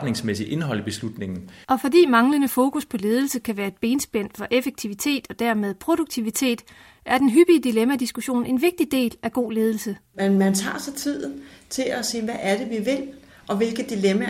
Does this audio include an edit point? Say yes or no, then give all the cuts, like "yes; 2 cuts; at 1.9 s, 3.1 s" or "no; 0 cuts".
yes; 1 cut; at 1.6 s